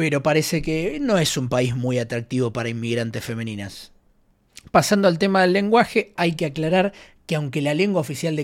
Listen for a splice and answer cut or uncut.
uncut